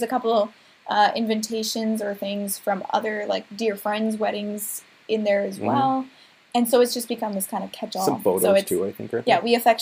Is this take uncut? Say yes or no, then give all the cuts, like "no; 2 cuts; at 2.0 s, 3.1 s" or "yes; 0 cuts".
yes; 0 cuts